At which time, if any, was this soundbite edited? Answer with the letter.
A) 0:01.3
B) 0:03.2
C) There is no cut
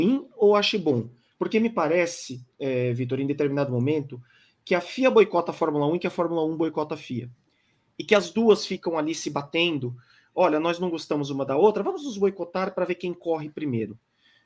A